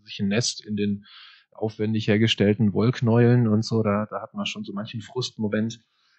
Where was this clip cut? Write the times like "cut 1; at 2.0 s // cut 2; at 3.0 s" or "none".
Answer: none

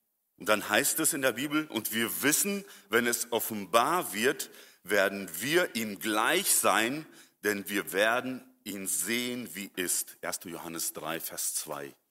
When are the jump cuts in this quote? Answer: cut 1; at 9.7 s

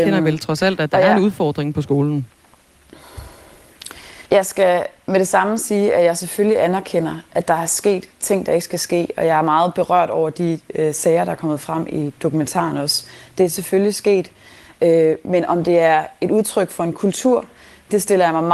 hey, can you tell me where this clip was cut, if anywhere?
cut 1; at 4.3 s

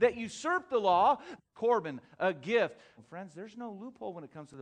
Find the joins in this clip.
cut 1; at 1.4 s // cut 2; at 3.0 s

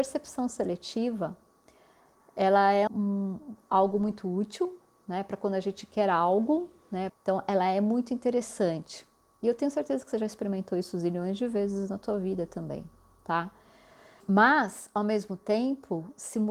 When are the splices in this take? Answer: cut 1; at 2.9 s // cut 2; at 7.1 s // cut 3; at 14.2 s

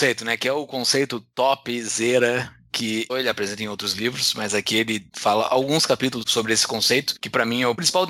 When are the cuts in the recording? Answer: cut 1; at 3.1 s

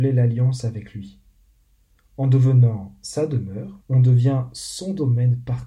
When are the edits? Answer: cut 1; at 3.8 s

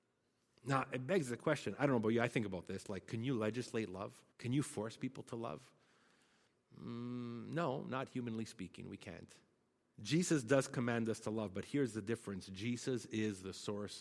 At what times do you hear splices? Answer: cut 1; at 4.3 s // cut 2; at 9.9 s

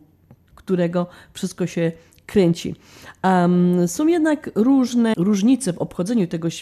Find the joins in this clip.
cut 1; at 5.1 s

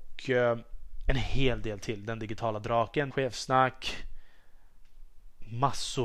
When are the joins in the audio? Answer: cut 1; at 3.1 s

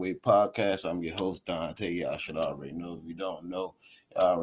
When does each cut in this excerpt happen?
none

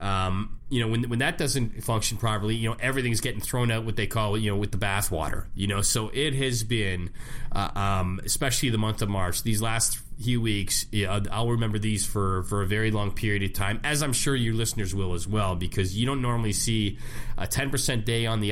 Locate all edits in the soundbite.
none

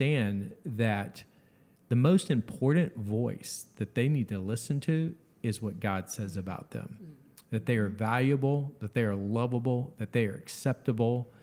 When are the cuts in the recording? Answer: none

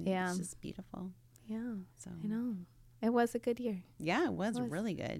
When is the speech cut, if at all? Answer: cut 1; at 1.9 s

